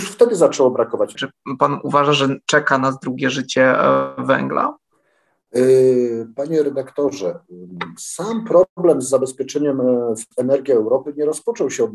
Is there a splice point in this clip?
yes; 1 cut; at 1.2 s

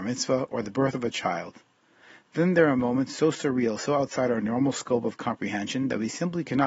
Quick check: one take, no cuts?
yes; 0 cuts

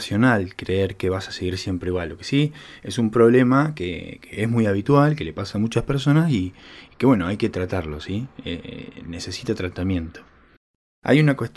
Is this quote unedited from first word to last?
yes; 0 cuts

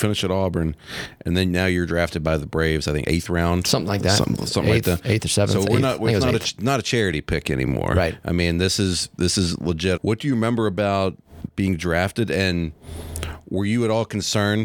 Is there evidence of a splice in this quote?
yes; 1 cut; at 10.0 s

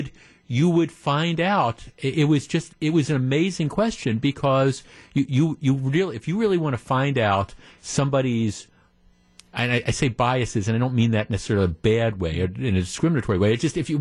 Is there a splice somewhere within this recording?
no; 0 cuts

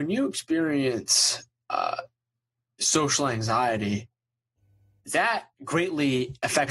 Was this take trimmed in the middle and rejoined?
yes; 1 cut; at 5.5 s

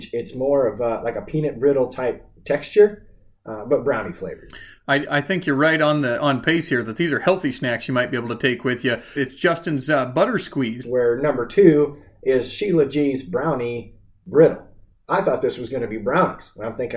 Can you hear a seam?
yes; 2 cuts; at 9.2 s, 10.8 s

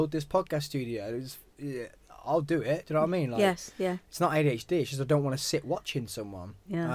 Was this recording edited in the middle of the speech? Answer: no; 0 cuts

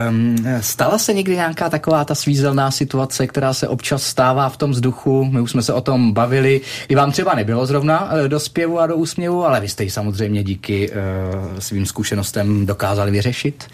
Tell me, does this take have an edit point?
no; 0 cuts

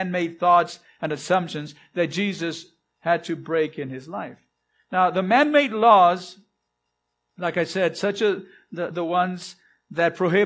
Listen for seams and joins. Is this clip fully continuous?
no; 1 cut; at 8.9 s

